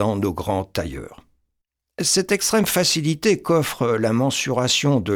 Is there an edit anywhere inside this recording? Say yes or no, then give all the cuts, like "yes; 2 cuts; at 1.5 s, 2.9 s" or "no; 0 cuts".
no; 0 cuts